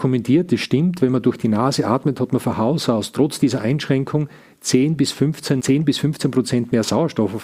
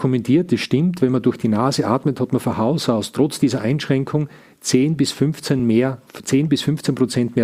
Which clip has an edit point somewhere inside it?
first; 1 cut; at 5.6 s

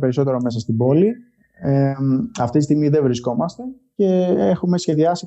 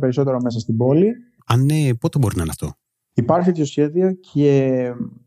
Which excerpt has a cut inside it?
second; 1 cut; at 1.4 s

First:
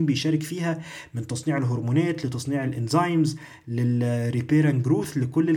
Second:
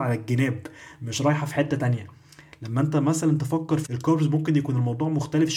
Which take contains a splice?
second; 1 cut; at 3.9 s

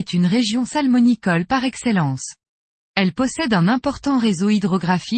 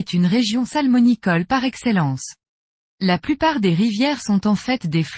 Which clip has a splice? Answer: second; 1 cut; at 2.8 s

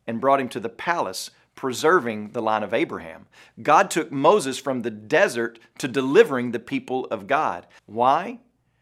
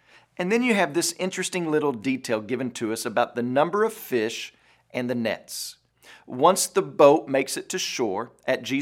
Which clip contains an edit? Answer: first; 1 cut; at 7.8 s

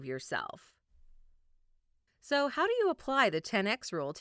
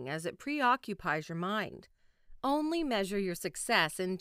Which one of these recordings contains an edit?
first; 1 cut; at 2.1 s

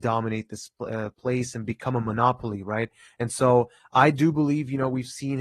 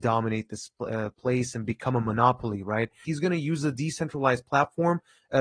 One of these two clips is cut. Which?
second; 1 cut; at 3.1 s

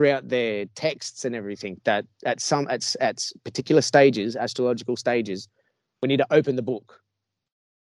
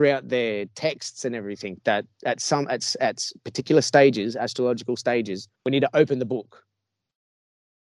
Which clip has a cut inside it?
second; 1 cut; at 5.5 s

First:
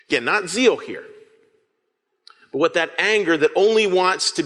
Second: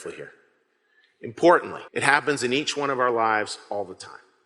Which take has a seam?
second; 1 cut; at 1.9 s

